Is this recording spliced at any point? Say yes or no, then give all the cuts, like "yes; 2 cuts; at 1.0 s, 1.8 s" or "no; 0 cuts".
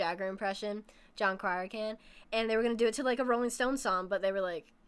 no; 0 cuts